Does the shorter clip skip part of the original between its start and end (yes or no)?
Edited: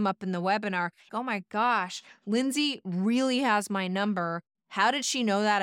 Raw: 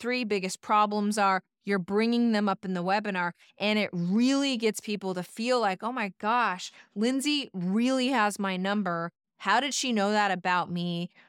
yes